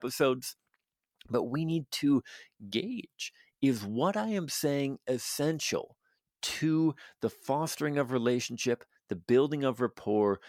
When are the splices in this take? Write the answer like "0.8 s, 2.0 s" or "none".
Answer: none